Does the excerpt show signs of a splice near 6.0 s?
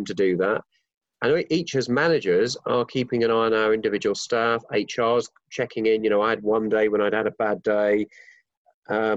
no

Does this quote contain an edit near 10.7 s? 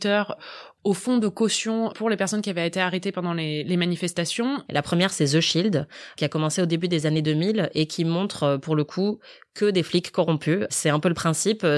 no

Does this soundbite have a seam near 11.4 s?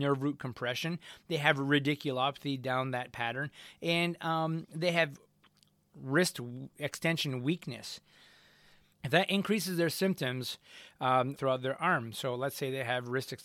yes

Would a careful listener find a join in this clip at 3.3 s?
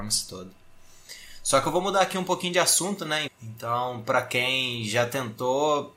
yes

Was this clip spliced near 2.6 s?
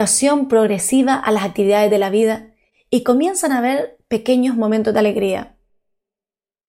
no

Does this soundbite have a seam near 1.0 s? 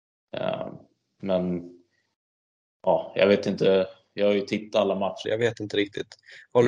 no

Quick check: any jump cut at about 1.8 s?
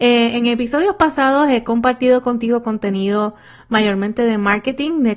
no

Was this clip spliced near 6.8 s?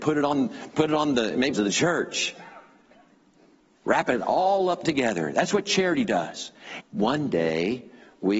yes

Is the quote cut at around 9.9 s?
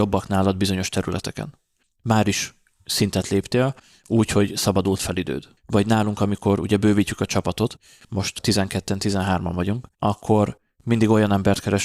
yes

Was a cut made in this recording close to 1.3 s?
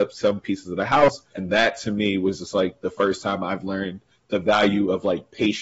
yes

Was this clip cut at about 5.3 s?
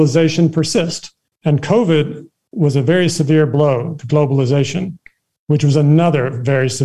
yes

